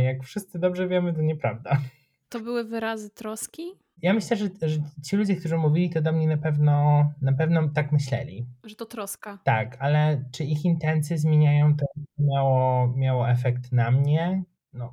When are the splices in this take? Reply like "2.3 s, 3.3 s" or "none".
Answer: none